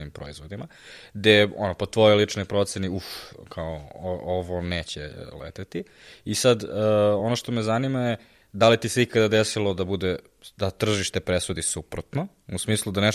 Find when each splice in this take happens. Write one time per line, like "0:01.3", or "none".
none